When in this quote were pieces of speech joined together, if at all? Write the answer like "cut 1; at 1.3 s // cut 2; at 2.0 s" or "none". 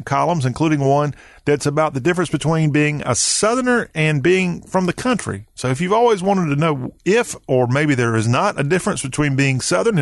none